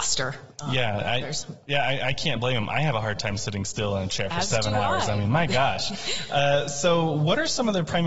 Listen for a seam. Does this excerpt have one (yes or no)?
no